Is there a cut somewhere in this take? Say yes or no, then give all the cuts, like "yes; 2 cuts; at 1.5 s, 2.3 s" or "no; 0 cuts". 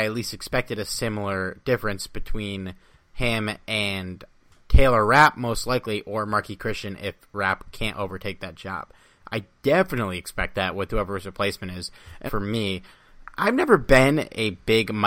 yes; 1 cut; at 12.3 s